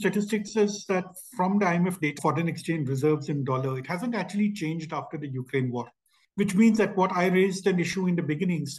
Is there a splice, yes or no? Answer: yes